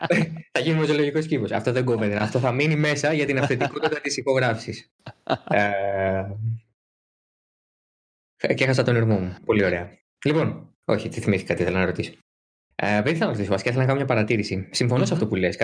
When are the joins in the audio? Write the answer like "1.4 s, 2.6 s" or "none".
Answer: none